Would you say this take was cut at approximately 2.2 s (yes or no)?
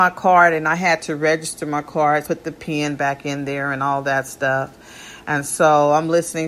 yes